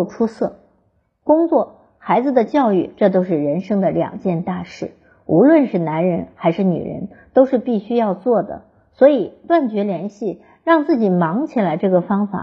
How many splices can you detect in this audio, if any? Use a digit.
0